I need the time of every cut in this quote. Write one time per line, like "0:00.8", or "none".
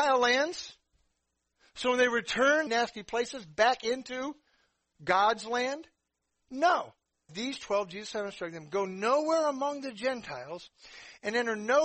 0:02.7
0:07.3